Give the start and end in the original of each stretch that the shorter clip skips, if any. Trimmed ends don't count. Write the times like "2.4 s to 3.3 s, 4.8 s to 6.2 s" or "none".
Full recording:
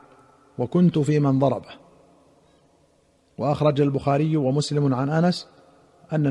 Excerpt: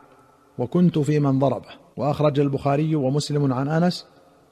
1.9 s to 3.3 s